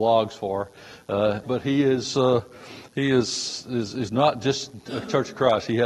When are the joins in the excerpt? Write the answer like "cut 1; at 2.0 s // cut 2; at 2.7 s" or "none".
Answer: cut 1; at 1.4 s